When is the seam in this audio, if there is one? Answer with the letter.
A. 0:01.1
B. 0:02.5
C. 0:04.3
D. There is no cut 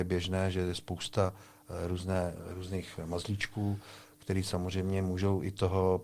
D